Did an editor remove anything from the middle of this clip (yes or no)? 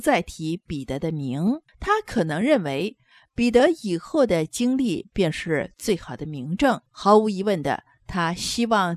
yes